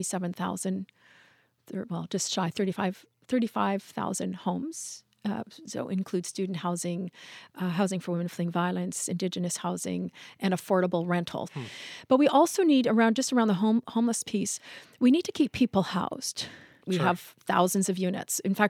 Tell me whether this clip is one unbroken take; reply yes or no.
no